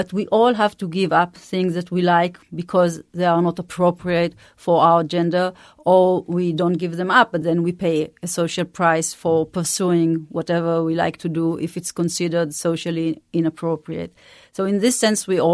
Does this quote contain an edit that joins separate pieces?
no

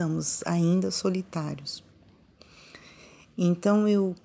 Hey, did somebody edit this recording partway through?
no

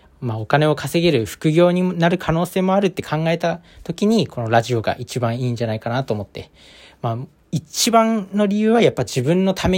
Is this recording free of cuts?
yes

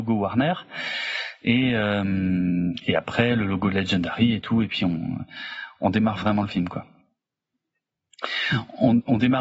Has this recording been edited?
no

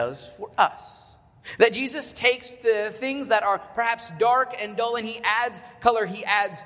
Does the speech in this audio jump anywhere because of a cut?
no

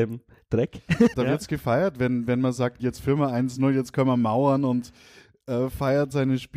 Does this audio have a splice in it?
yes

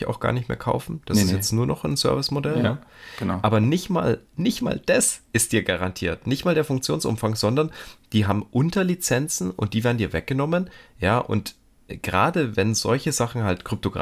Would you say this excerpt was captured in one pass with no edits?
yes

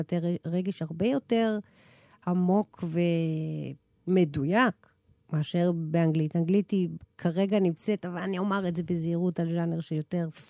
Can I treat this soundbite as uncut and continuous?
yes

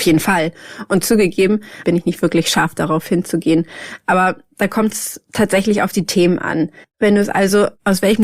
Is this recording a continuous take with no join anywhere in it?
no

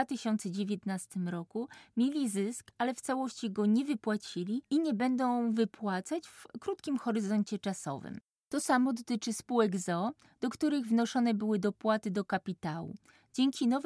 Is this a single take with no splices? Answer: yes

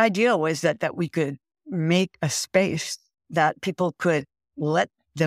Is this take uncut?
yes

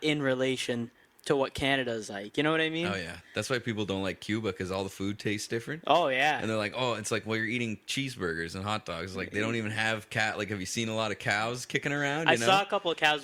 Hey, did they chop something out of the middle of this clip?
no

